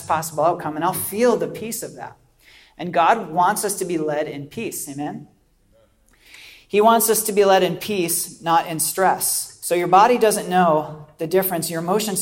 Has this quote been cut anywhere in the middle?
no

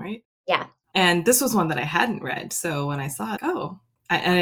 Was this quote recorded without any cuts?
no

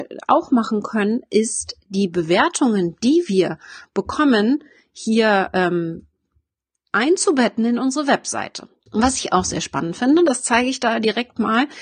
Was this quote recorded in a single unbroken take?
no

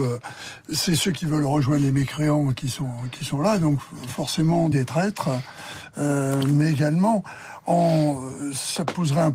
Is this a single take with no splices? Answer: no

